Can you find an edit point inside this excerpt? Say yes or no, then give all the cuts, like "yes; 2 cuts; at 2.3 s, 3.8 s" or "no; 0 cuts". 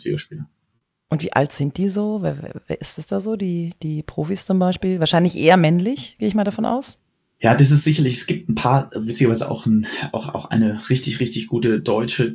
no; 0 cuts